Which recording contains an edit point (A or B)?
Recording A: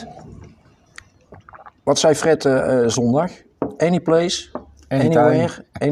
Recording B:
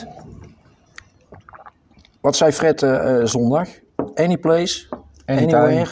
A